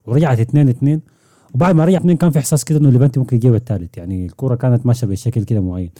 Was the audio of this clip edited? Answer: yes; 1 cut; at 2.0 s

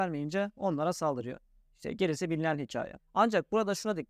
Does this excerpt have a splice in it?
yes; 1 cut; at 3.0 s

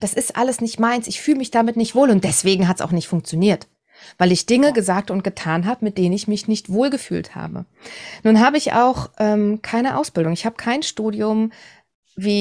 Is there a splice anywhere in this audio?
no; 0 cuts

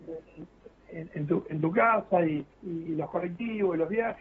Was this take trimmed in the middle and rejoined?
yes; 1 cut; at 2.5 s

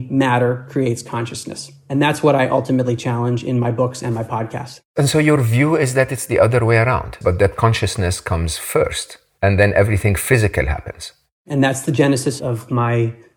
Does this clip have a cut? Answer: yes; 1 cut; at 7.2 s

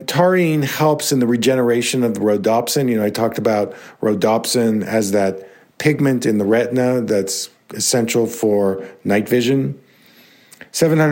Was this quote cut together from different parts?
no; 0 cuts

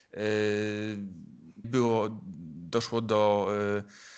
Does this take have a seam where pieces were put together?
yes; 1 cut; at 1.6 s

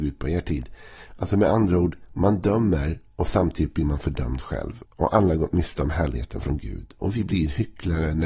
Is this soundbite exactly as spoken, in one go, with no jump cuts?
no; 1 cut; at 4.8 s

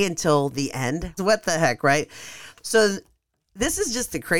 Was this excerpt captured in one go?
no; 1 cut; at 1.2 s

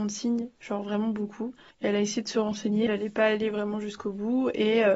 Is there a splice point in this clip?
yes; 2 cuts; at 1.7 s, 2.9 s

